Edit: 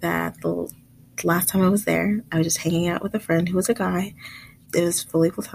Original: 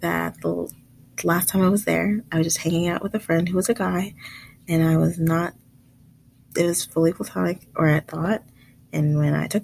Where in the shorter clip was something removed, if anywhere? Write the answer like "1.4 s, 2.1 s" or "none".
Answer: 4.7 s